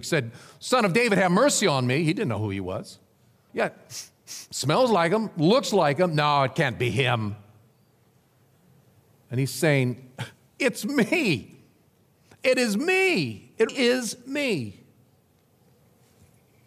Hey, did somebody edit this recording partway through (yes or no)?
yes